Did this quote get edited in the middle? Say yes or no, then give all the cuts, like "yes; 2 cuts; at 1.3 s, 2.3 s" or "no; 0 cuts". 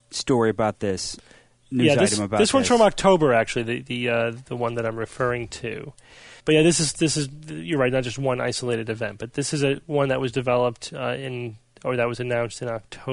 no; 0 cuts